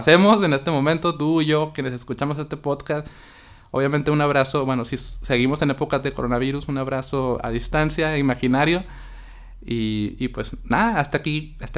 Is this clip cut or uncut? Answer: uncut